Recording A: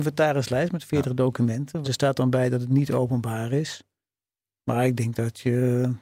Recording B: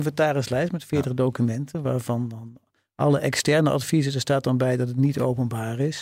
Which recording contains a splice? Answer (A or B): A